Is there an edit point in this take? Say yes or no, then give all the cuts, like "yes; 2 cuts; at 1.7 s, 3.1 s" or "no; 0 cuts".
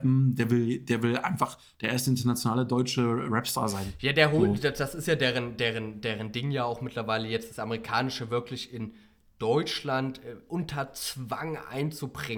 no; 0 cuts